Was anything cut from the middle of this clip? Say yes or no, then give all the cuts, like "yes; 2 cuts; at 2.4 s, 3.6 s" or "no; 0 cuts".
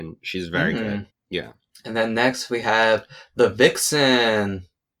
yes; 1 cut; at 1.1 s